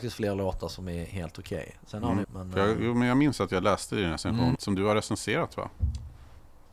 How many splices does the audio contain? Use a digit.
2